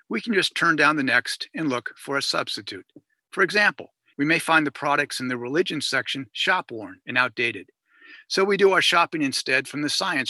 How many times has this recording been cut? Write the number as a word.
one